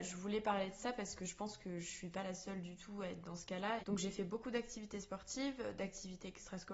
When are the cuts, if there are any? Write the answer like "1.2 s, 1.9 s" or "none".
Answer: 3.8 s